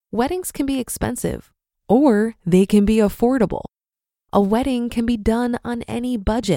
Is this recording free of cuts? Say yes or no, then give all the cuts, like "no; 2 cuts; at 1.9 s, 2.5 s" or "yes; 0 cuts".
yes; 0 cuts